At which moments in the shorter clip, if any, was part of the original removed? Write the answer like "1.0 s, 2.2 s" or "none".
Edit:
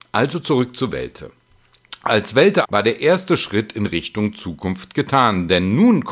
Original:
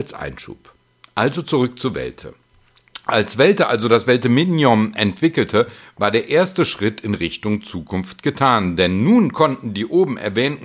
2.6 s